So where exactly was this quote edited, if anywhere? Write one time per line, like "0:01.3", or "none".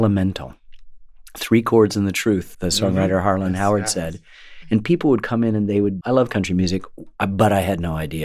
0:02.5
0:04.6
0:06.0